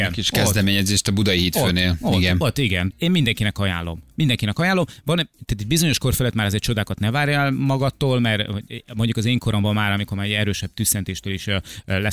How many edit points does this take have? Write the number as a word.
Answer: one